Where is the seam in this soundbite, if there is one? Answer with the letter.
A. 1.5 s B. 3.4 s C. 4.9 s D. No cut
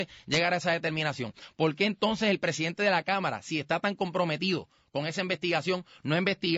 D